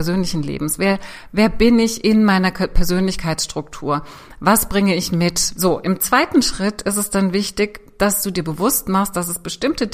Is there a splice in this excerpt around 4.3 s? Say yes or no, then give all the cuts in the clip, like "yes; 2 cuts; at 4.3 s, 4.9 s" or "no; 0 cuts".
no; 1 cut; at 5.6 s